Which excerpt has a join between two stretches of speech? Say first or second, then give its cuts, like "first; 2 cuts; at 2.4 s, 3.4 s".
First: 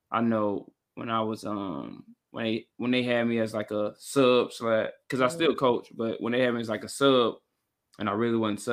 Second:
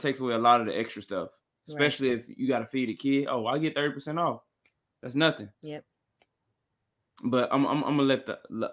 second; 1 cut; at 5.5 s